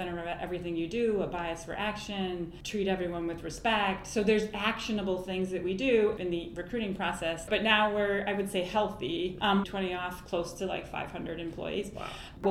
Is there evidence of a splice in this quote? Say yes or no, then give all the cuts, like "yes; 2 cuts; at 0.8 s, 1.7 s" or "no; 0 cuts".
yes; 2 cuts; at 7.5 s, 9.6 s